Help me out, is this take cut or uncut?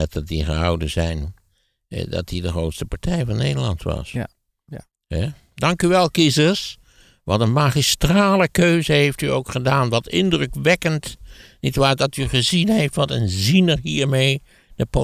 uncut